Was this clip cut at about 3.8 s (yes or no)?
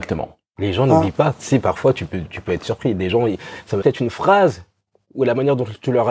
yes